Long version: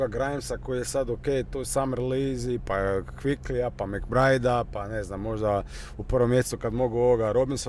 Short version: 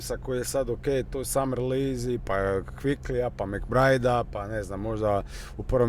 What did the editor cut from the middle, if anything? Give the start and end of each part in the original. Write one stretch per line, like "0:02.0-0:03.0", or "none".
none